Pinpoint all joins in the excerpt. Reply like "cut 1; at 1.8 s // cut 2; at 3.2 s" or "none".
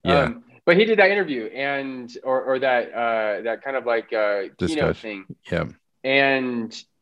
none

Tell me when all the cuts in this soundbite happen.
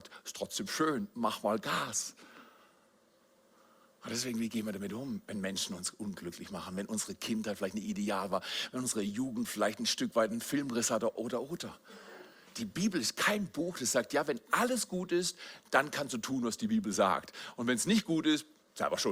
cut 1; at 11.2 s

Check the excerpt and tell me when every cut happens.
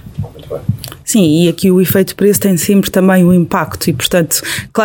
none

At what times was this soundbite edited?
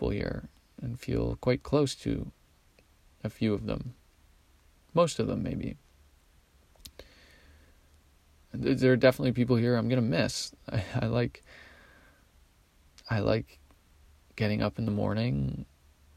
none

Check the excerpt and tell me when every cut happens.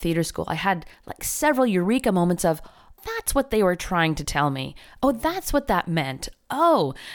cut 1; at 3.0 s

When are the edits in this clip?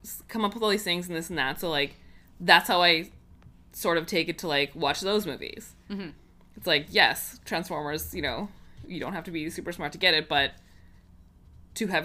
none

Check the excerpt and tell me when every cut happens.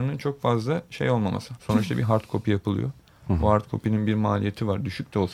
cut 1; at 1.6 s

